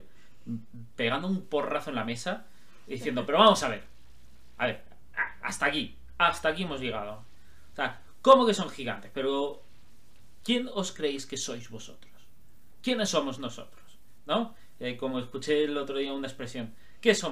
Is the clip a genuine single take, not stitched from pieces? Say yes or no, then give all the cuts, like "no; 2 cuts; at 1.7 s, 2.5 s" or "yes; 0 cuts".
yes; 0 cuts